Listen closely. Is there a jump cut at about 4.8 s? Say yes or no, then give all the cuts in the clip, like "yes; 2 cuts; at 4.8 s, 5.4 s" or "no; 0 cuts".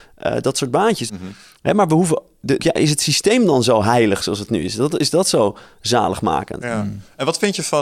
no; 3 cuts; at 1.1 s, 2.6 s, 6.6 s